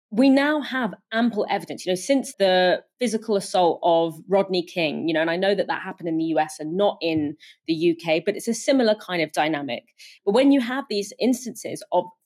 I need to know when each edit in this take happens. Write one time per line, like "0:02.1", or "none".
0:02.3
0:10.2